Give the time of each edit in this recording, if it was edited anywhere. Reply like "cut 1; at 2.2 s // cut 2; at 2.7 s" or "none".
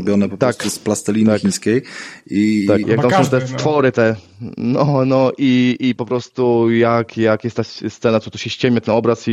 cut 1; at 2.8 s